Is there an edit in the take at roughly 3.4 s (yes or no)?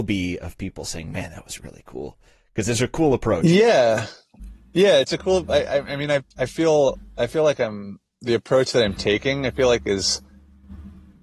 no